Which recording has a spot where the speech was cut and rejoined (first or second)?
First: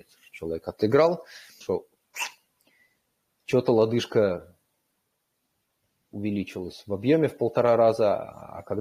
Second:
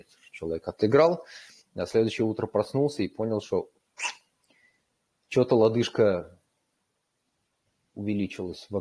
first